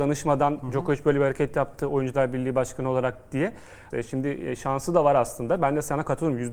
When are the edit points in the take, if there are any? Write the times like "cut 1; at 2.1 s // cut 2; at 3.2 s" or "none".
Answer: cut 1; at 3.9 s